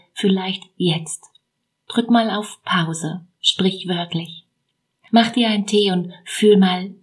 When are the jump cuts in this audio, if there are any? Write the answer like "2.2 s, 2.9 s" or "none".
none